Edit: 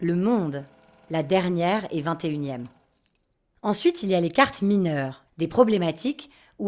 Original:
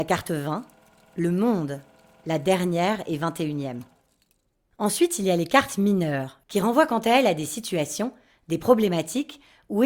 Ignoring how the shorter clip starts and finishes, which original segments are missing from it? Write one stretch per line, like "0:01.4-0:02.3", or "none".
0:06.4-0:08.4

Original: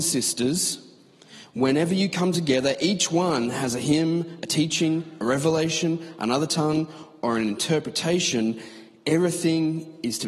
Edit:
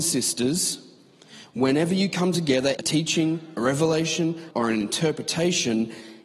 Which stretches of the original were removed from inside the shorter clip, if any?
0:02.8-0:04.4
0:06.1-0:07.2

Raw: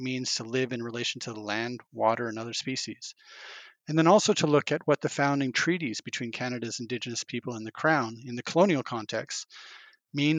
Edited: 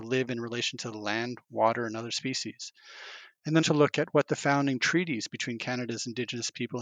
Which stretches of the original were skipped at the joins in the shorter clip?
0:04.0-0:04.3

